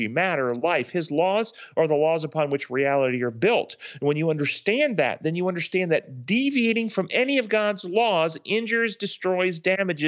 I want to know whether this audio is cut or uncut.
uncut